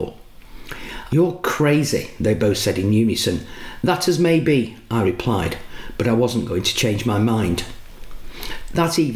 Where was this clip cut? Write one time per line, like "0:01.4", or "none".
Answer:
0:01.1